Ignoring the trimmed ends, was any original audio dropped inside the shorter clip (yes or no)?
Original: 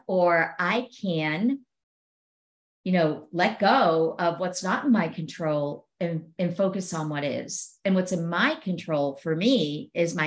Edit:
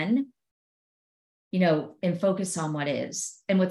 yes